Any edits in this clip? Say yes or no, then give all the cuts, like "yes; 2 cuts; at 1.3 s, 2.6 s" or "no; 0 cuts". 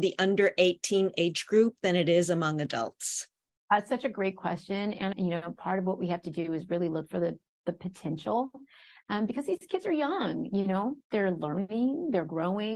yes; 1 cut; at 5.1 s